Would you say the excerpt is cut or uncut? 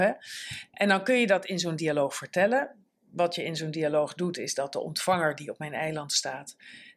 uncut